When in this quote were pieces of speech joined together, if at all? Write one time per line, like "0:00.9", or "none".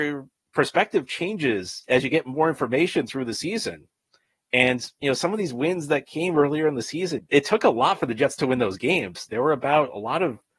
0:07.2
0:09.3